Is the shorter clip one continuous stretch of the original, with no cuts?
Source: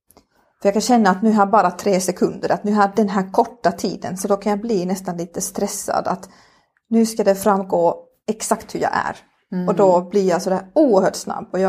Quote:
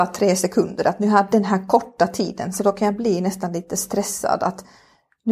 yes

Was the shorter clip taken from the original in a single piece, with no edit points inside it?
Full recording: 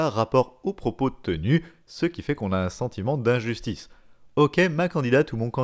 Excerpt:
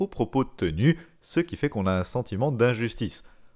yes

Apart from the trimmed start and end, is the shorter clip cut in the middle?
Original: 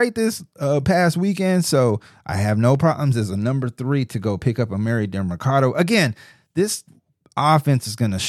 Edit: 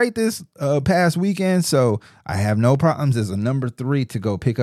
no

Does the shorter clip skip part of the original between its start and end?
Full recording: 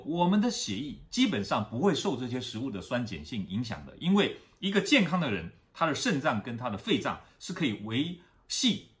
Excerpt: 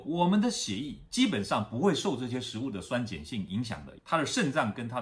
yes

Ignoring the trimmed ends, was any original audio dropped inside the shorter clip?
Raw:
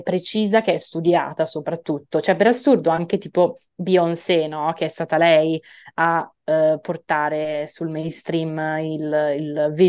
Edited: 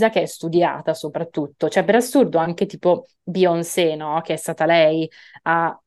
no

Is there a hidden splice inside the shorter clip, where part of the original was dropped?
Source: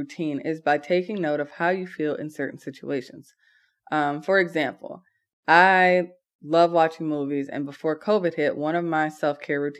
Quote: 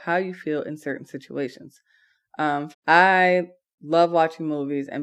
yes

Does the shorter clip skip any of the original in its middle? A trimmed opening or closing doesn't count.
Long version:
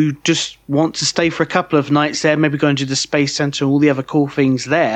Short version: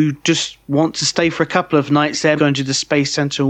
yes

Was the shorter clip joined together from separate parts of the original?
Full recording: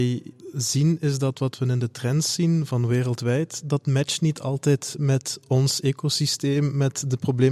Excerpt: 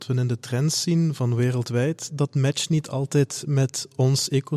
no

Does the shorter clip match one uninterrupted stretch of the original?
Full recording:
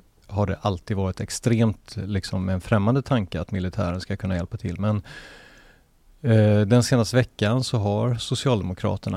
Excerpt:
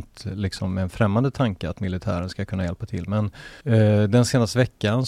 no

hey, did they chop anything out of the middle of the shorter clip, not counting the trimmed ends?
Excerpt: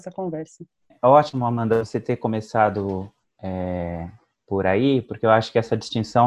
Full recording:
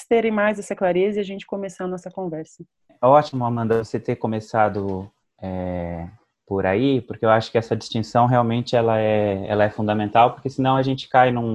no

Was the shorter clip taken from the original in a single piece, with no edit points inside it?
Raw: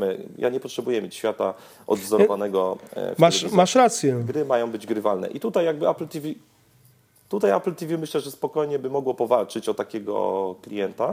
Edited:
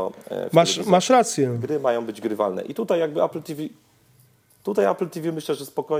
yes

